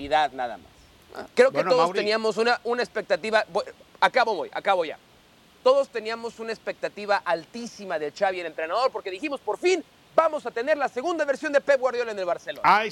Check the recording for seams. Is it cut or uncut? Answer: cut